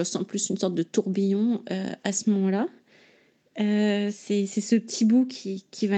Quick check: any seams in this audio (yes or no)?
no